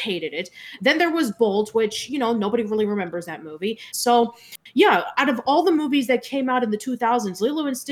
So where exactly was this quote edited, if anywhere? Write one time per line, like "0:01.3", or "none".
0:03.9